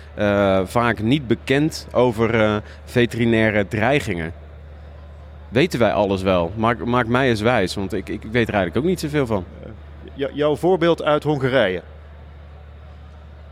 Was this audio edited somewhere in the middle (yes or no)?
no